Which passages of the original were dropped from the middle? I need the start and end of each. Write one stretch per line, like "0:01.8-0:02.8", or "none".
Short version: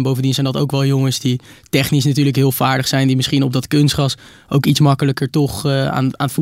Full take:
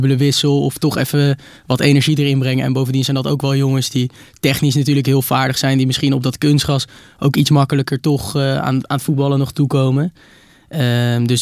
none